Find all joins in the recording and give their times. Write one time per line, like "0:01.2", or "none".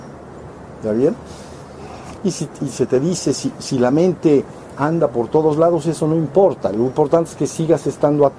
0:02.2